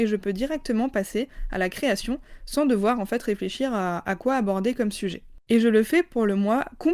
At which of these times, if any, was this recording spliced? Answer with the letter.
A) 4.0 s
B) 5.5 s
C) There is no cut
B